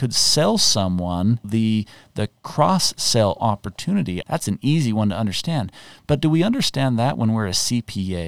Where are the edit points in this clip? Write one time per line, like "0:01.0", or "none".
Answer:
0:01.4
0:04.2